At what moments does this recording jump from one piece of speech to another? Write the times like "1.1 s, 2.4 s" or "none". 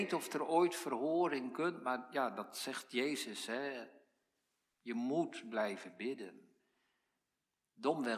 none